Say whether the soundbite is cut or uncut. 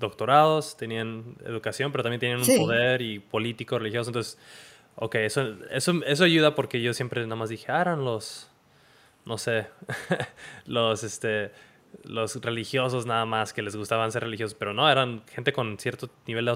uncut